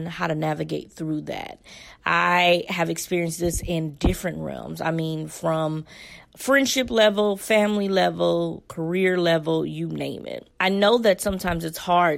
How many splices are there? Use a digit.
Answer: 0